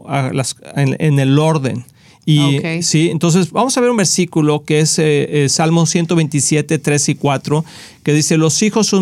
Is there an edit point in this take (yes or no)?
no